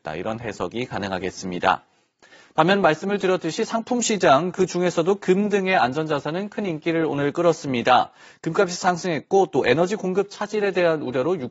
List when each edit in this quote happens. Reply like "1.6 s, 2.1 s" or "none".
none